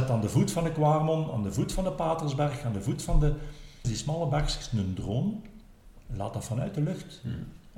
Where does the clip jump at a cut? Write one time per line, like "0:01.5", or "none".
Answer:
0:03.8